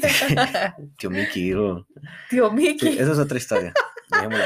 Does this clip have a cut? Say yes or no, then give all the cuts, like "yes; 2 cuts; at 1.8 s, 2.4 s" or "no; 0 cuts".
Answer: no; 0 cuts